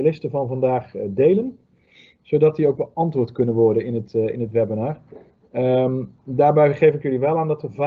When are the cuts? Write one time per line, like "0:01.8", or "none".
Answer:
none